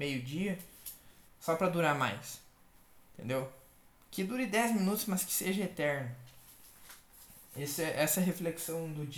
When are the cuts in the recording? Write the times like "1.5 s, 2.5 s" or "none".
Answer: 1.3 s